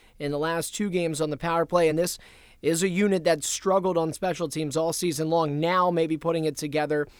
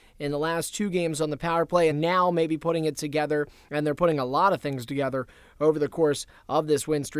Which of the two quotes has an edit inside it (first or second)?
second